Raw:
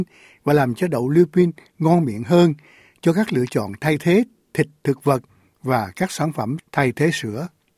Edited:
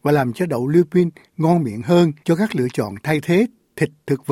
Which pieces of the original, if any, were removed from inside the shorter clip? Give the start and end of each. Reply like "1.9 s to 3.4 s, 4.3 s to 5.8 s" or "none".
2.6 s to 3.0 s